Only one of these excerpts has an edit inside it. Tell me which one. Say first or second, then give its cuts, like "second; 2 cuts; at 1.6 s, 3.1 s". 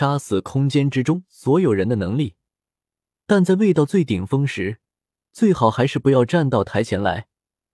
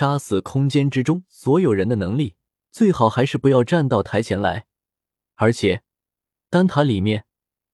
second; 1 cut; at 2.6 s